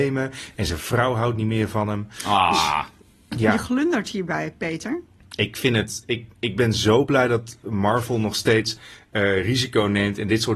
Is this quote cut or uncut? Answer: uncut